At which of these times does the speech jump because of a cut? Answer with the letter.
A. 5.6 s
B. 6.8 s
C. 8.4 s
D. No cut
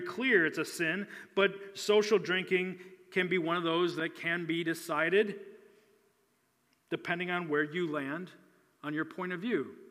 D